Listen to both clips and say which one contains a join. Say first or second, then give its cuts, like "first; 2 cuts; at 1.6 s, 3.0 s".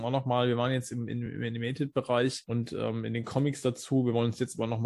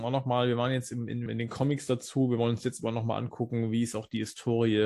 second; 1 cut; at 1.3 s